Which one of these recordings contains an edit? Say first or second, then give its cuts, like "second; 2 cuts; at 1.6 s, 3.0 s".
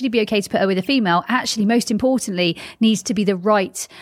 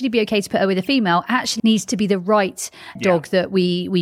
second; 2 cuts; at 1.6 s, 3.0 s